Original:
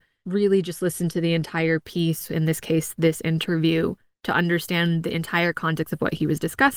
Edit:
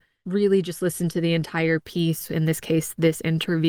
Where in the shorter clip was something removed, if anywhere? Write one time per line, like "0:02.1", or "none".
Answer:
none